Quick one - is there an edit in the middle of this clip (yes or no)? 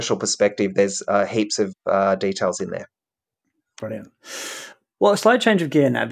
no